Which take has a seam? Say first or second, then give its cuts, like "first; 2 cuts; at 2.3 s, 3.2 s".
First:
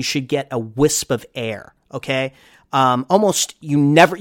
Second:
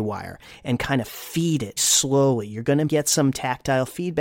second; 2 cuts; at 1.8 s, 2.9 s